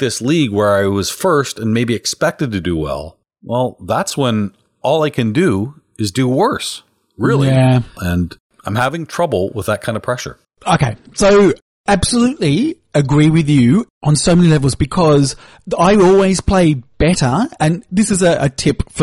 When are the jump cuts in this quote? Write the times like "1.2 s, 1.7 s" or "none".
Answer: 7.9 s